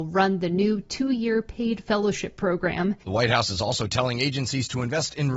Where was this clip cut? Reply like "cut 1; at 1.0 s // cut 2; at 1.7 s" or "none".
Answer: cut 1; at 3.0 s